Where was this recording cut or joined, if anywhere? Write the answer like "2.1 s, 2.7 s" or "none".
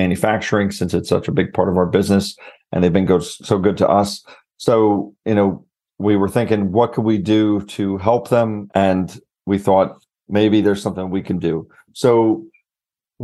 8.7 s, 10.3 s

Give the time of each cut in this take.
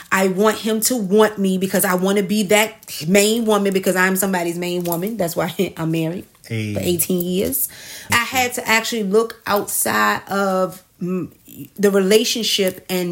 8.1 s, 10.9 s

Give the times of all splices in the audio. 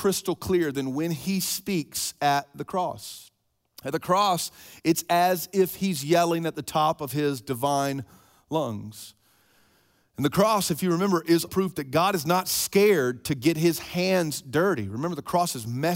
11.5 s

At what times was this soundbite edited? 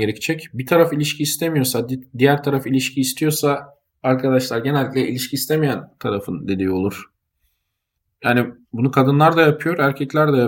none

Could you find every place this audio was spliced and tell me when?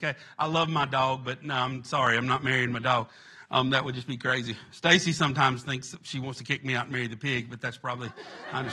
none

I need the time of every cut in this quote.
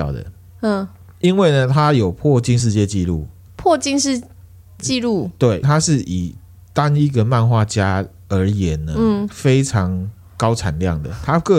2.6 s, 5.6 s

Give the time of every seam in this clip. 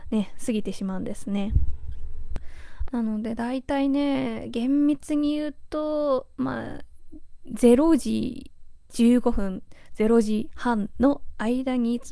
2.9 s

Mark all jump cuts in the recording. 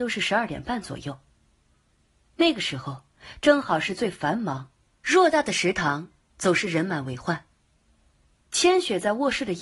4.8 s, 8.4 s

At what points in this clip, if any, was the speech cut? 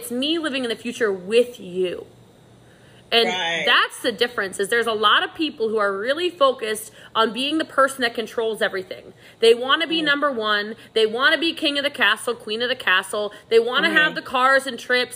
none

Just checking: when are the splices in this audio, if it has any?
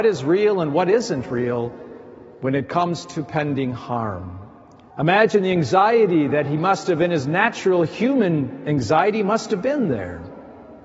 4.9 s

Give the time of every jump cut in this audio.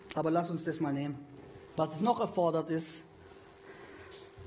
1.7 s

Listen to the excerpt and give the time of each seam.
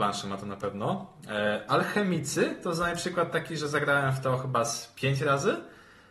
none

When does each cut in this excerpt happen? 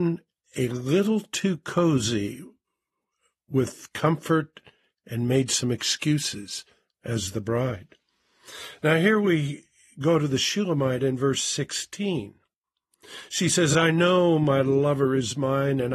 none

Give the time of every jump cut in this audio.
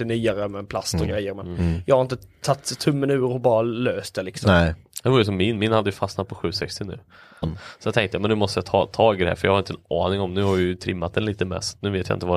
7.4 s

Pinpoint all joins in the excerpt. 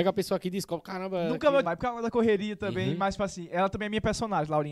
1.6 s

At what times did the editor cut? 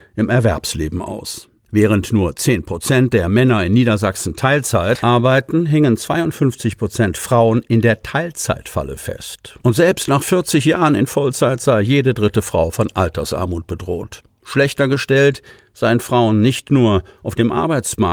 none

